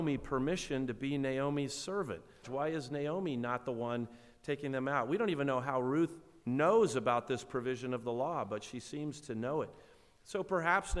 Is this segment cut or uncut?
cut